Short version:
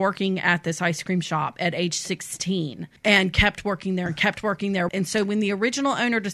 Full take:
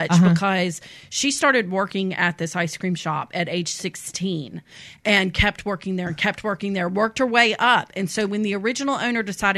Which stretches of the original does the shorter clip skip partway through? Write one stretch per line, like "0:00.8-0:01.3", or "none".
0:04.7-0:05.0
0:06.9-0:07.9